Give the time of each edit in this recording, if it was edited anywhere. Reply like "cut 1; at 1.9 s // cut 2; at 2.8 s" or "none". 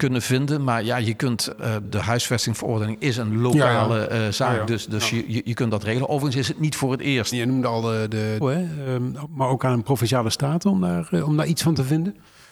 cut 1; at 7.3 s // cut 2; at 8.4 s